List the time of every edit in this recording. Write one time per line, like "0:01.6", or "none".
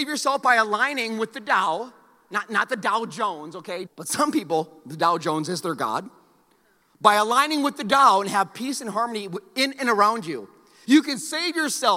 0:03.9
0:10.8